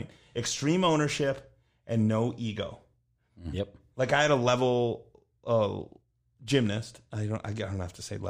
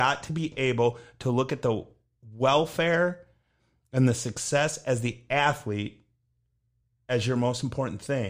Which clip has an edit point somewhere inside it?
first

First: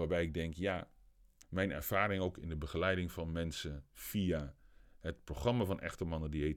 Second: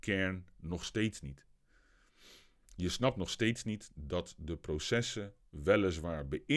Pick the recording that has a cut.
first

